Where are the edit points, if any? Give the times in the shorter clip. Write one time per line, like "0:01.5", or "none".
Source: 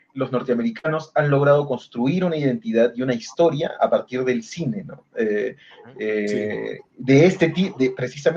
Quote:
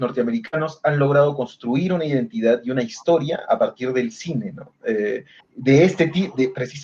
0:05.4